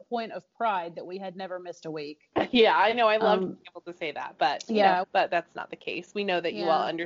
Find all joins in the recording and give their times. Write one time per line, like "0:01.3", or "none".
0:05.0